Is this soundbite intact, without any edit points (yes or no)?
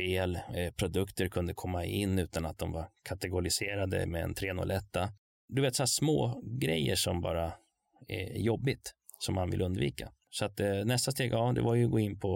yes